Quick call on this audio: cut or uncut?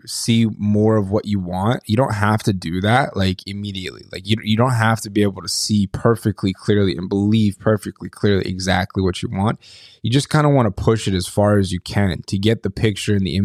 uncut